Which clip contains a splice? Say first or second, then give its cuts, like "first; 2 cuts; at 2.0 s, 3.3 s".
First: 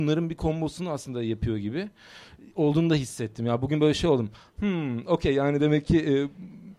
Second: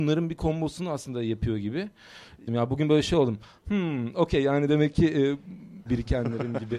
second; 2 cuts; at 2.5 s, 5.9 s